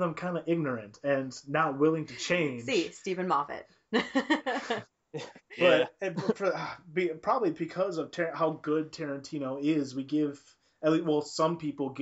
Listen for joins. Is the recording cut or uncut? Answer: uncut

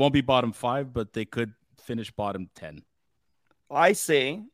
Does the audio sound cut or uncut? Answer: uncut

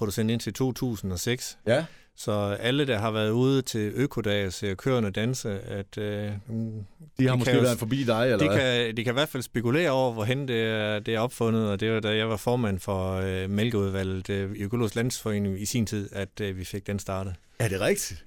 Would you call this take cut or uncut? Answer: uncut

